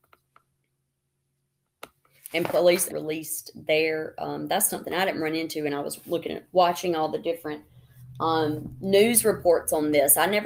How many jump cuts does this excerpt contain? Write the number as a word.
one